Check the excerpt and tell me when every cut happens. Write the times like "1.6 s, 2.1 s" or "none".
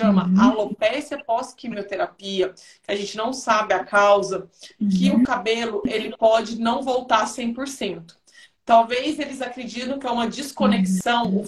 none